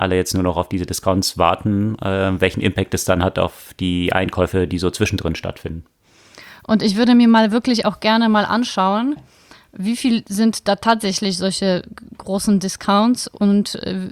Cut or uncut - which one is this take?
uncut